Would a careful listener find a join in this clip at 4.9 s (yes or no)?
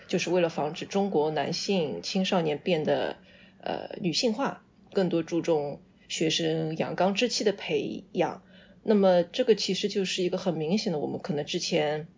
yes